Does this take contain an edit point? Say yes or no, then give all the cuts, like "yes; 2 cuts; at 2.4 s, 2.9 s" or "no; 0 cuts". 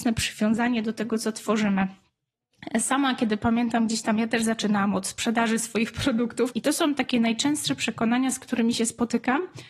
yes; 1 cut; at 6.5 s